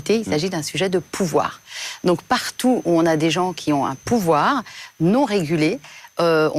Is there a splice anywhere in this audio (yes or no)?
no